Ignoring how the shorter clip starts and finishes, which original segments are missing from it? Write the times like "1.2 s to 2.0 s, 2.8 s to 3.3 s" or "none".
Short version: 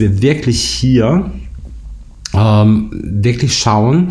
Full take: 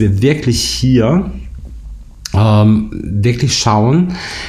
none